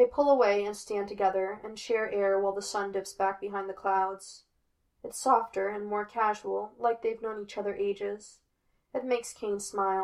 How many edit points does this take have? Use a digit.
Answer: 1